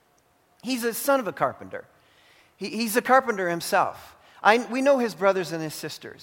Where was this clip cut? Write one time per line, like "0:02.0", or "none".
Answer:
none

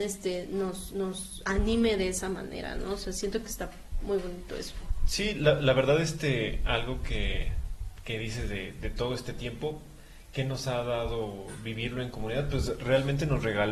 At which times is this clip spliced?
none

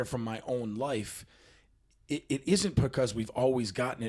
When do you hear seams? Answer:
none

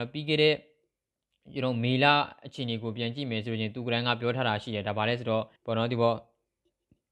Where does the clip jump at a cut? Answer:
0:05.6

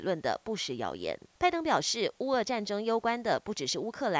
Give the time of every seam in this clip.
0:01.3

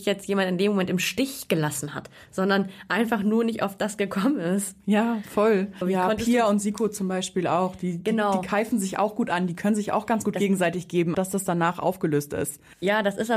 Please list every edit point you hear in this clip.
0:05.8
0:11.1

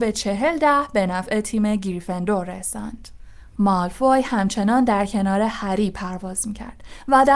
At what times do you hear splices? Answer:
0:03.6

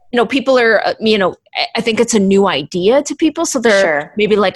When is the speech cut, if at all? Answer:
none

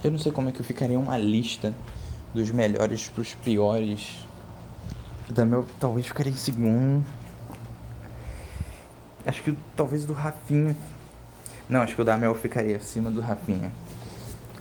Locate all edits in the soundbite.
0:05.3

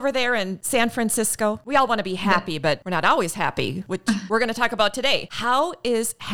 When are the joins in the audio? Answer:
none

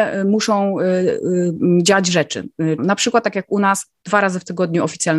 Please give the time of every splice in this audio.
0:02.8

